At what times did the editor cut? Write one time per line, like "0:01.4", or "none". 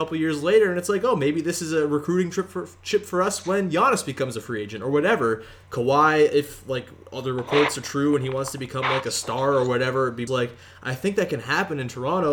0:05.6
0:10.3